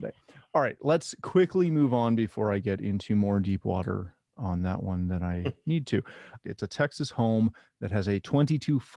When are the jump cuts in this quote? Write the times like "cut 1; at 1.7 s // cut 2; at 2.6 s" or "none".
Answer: cut 1; at 6.4 s